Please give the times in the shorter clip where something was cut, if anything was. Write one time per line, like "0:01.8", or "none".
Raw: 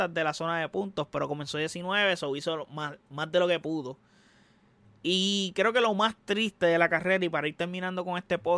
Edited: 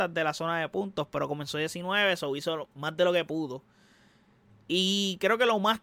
0:02.6

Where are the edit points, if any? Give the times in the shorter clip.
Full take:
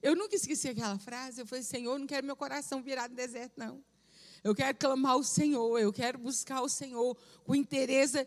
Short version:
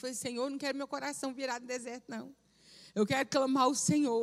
none

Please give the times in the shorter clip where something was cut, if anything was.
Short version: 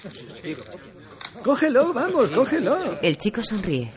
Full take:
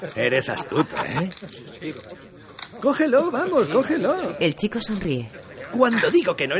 none

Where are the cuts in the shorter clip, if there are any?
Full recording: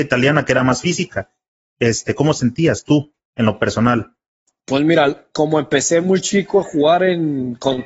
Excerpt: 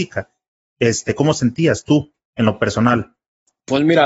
none

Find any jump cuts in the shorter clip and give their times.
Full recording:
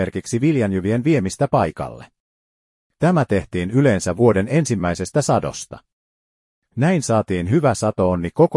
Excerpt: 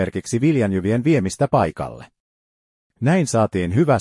0:02.9

